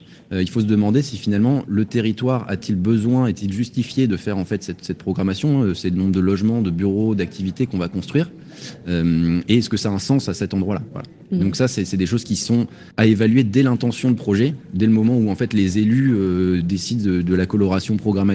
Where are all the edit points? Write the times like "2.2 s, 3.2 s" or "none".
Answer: 12.9 s